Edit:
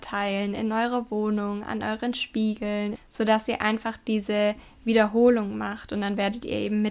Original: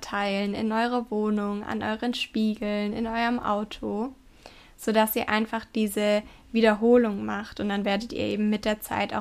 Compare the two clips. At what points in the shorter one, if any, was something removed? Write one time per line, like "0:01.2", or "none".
0:02.9